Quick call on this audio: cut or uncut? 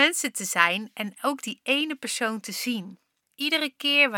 cut